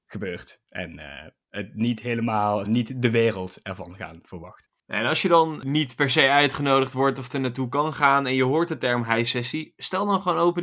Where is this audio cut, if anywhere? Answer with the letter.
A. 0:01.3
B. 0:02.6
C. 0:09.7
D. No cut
B